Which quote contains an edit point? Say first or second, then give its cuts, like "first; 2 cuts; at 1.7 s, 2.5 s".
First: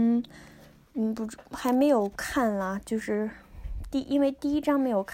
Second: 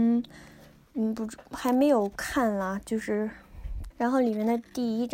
second; 1 cut; at 3.9 s